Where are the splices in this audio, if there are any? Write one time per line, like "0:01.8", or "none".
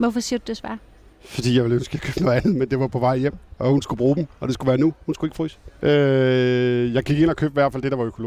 0:05.8